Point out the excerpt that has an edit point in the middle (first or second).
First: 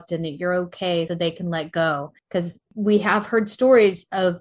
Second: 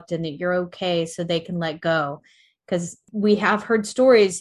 first